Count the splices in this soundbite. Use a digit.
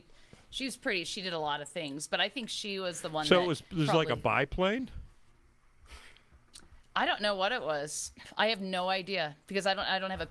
0